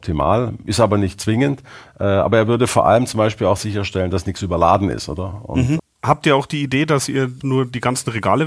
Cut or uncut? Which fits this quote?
cut